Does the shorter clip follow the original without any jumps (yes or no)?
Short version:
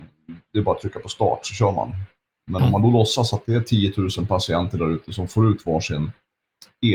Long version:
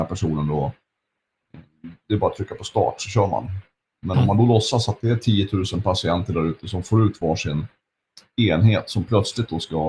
yes